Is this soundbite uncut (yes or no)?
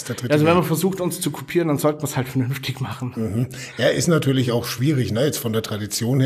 yes